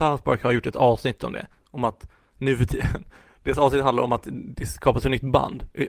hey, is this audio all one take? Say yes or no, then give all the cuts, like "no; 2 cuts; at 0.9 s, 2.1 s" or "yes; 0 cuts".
yes; 0 cuts